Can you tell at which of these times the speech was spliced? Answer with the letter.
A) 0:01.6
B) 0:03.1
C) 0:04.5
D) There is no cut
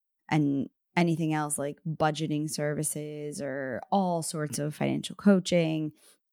D